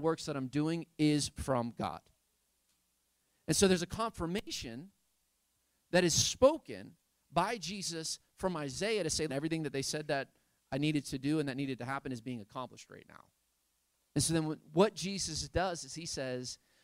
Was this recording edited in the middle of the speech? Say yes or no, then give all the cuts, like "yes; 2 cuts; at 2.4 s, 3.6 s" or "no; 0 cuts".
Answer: yes; 2 cuts; at 9.3 s, 14.1 s